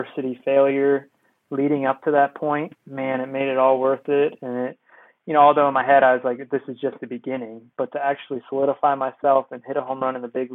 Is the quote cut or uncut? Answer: uncut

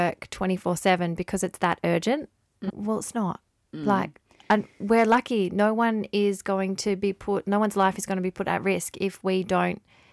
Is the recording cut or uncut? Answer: cut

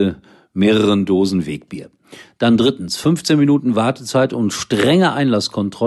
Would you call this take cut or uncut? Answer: uncut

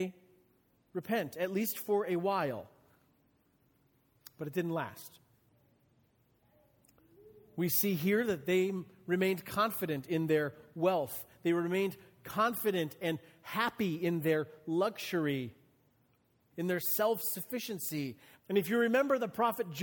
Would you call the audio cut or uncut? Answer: cut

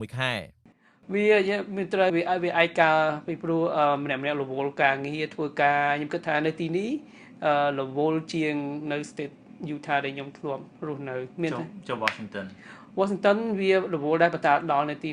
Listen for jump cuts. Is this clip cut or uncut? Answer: cut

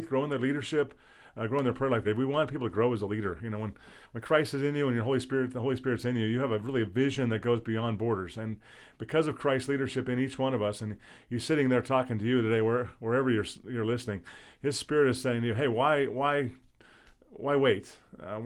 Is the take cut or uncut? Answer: cut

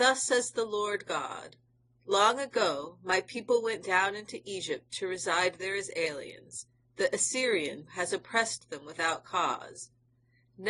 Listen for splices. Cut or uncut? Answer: cut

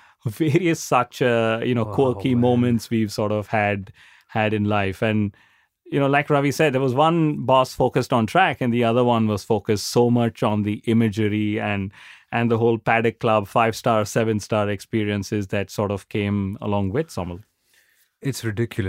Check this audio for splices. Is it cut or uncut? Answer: uncut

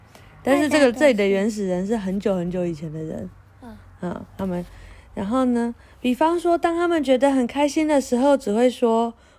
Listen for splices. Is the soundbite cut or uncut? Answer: uncut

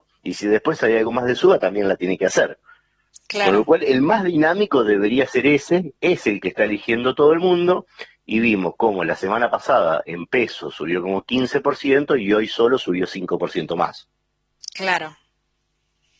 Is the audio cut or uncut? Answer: uncut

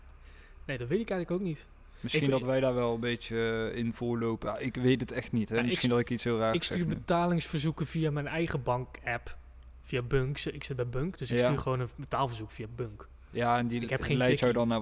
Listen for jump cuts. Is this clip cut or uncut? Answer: uncut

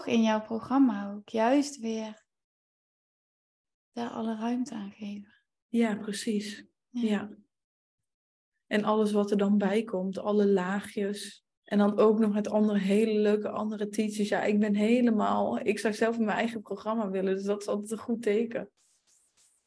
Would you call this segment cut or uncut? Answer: cut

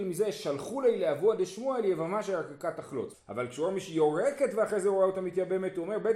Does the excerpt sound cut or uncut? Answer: cut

